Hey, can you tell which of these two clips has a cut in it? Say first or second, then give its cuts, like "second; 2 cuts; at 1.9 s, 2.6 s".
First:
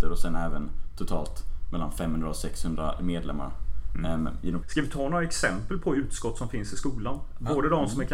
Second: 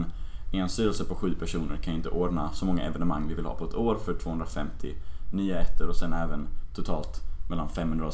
first; 1 cut; at 4.6 s